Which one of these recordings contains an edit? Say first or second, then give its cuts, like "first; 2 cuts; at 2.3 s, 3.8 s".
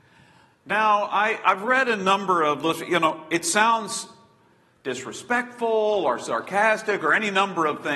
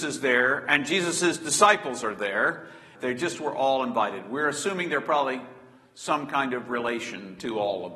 second; 1 cut; at 2.9 s